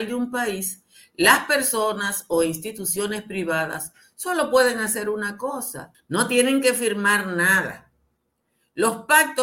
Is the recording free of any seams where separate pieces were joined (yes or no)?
no